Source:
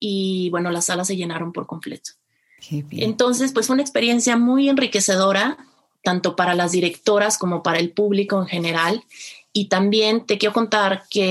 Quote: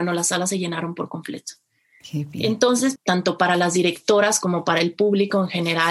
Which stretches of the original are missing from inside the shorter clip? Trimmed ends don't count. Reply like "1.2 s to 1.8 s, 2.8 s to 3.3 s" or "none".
3.5 s to 5.9 s